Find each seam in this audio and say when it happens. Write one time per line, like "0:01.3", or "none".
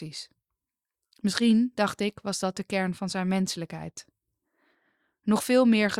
none